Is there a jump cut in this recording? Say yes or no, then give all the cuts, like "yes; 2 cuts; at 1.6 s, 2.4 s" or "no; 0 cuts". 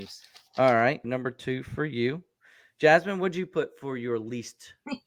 yes; 1 cut; at 1.0 s